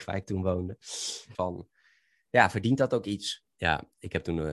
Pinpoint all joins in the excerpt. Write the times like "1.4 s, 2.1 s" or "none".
1.3 s, 3.4 s